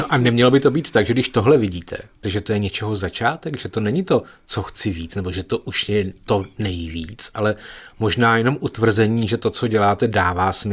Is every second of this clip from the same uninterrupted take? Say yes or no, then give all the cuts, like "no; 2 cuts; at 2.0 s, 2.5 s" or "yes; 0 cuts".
no; 1 cut; at 2.2 s